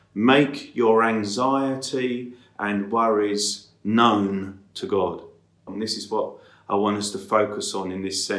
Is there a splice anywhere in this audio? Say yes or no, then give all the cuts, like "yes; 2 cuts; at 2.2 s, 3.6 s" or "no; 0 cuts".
yes; 1 cut; at 5.7 s